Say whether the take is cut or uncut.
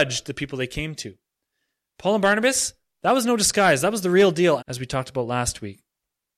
cut